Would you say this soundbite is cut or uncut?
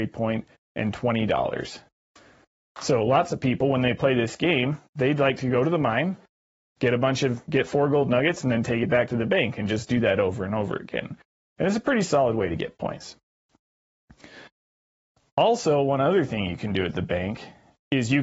uncut